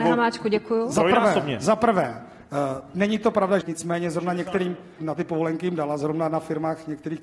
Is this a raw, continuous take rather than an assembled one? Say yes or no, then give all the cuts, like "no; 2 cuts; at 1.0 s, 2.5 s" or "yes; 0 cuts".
no; 2 cuts; at 3.6 s, 5.0 s